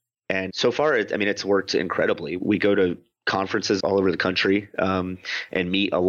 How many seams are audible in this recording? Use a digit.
0